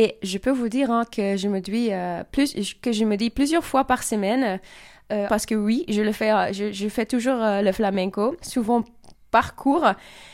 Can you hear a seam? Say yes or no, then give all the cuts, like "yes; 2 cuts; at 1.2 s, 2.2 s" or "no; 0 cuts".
yes; 2 cuts; at 5.3 s, 8.4 s